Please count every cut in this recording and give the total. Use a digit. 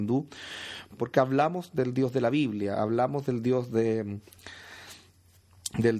1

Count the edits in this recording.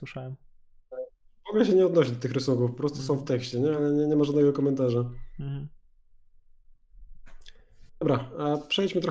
0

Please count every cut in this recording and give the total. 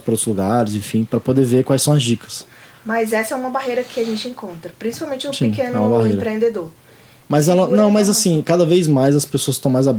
1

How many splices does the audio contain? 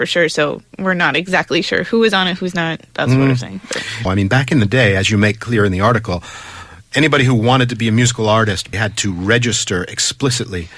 2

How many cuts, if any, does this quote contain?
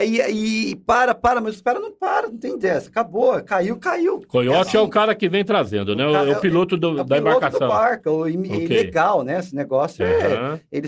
0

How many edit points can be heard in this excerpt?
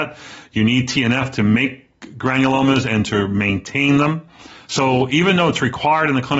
1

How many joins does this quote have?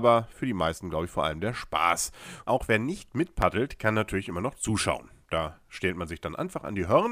1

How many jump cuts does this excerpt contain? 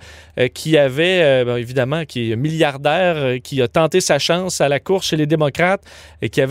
0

